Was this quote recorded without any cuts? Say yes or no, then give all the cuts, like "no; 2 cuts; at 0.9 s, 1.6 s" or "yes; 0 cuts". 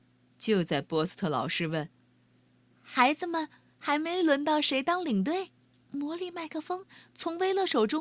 no; 1 cut; at 5.8 s